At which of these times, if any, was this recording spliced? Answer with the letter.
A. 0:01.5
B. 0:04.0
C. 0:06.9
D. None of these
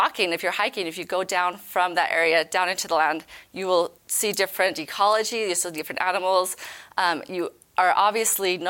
B